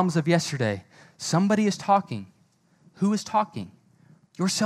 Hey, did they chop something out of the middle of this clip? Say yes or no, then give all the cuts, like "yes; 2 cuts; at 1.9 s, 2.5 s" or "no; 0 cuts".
no; 0 cuts